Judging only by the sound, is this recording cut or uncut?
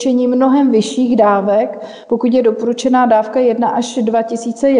uncut